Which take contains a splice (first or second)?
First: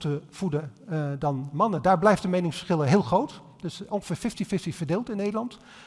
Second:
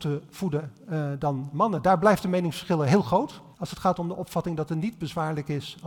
second